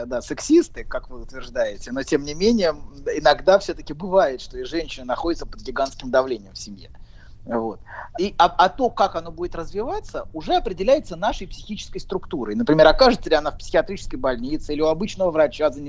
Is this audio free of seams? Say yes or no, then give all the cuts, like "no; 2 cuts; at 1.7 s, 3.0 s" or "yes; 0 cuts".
no; 1 cut; at 8.1 s